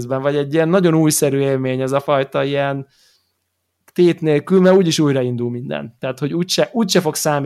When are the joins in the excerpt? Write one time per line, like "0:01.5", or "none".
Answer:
none